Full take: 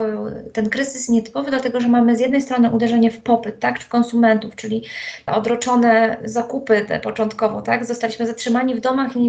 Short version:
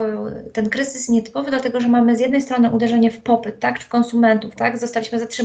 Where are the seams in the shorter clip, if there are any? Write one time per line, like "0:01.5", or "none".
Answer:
0:04.6